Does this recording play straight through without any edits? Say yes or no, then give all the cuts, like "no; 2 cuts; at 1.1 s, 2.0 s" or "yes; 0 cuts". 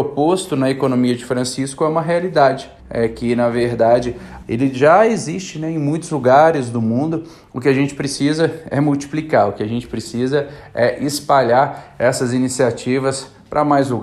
no; 2 cuts; at 2.8 s, 4.4 s